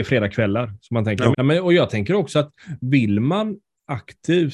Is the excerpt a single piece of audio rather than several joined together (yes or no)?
no